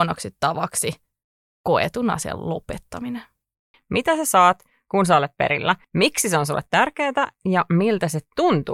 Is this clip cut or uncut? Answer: cut